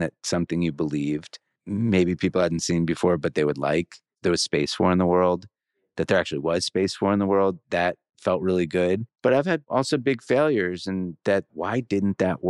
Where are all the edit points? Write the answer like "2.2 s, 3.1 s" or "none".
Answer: 11.5 s